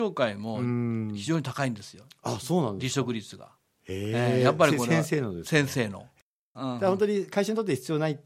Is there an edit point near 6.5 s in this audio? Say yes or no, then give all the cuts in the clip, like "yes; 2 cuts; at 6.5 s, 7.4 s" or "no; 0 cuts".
yes; 1 cut; at 6.5 s